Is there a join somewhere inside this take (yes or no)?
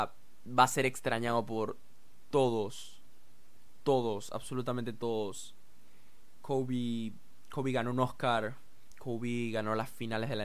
no